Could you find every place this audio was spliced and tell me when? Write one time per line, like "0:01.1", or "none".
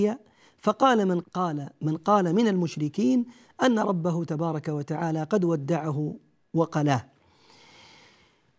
0:01.2